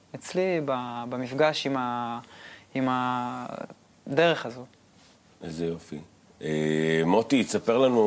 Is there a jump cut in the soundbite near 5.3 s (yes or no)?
no